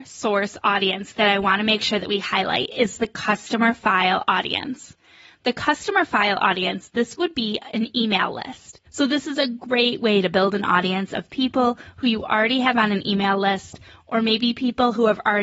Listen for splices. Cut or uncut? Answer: cut